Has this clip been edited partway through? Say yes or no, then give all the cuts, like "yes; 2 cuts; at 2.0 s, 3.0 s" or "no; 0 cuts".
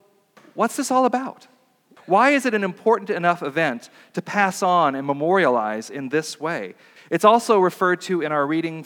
yes; 2 cuts; at 2.0 s, 7.0 s